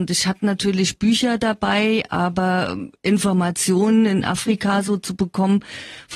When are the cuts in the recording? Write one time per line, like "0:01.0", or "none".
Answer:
none